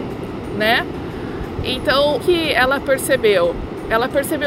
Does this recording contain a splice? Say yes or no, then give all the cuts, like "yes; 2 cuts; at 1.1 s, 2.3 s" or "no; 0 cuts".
yes; 1 cut; at 2.2 s